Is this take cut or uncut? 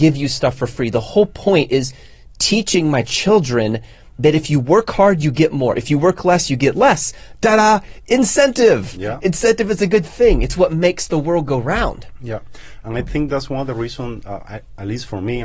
uncut